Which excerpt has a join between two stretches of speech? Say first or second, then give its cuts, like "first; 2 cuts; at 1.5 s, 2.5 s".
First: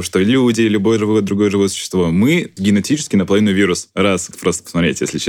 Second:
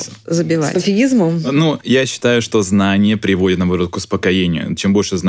first; 2 cuts; at 2.6 s, 4.3 s